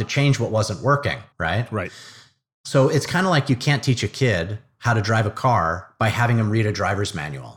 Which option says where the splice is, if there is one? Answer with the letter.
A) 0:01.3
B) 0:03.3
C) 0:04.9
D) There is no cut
A